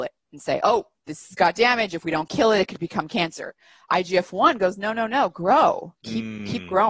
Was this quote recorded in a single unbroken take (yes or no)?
yes